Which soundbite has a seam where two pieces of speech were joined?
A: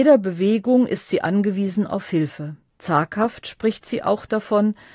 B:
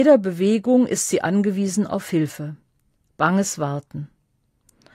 A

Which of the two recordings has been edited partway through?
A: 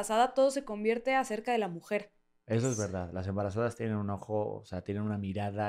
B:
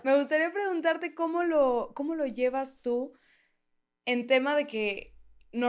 A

